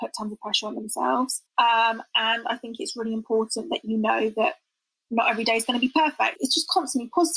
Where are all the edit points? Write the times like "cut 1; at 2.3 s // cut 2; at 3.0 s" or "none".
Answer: cut 1; at 1.5 s // cut 2; at 6.3 s